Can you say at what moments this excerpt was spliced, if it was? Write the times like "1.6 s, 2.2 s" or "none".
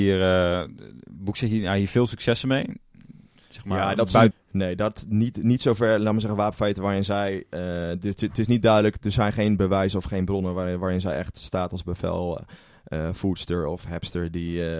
4.3 s